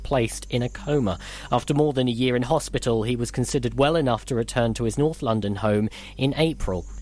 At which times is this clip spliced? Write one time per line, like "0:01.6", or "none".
none